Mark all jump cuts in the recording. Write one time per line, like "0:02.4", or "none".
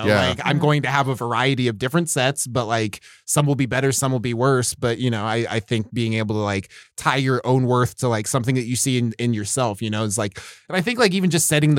none